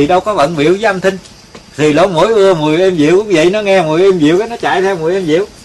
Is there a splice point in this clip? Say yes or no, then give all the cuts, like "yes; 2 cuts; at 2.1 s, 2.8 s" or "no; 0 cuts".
yes; 1 cut; at 1.7 s